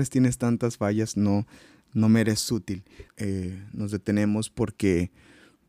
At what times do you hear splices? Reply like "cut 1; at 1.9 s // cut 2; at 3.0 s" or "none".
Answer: cut 1; at 3.1 s